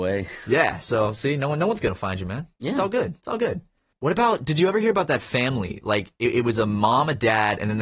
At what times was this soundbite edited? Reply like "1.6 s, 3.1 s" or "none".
none